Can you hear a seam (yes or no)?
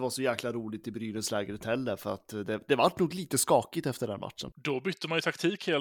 yes